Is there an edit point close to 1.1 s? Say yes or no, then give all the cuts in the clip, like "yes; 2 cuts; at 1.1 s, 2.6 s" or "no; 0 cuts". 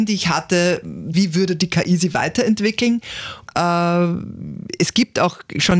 yes; 2 cuts; at 1.1 s, 3.5 s